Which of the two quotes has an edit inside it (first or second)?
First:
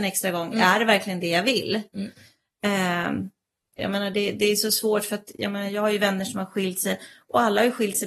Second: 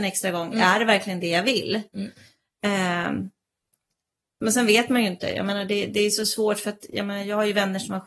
first